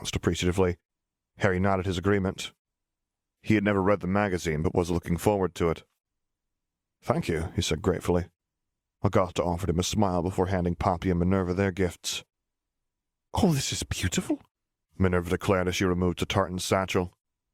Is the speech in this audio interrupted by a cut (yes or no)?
no